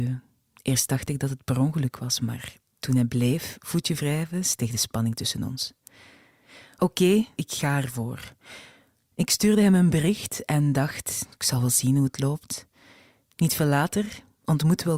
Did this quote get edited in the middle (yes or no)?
yes